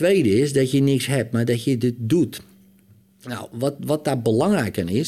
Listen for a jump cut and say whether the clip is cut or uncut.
uncut